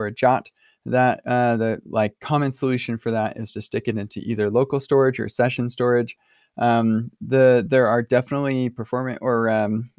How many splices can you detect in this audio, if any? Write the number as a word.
zero